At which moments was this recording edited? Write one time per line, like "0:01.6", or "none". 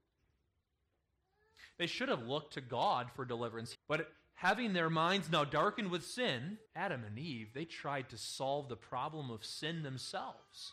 0:03.7
0:06.7